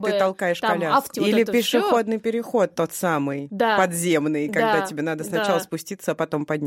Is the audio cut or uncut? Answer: cut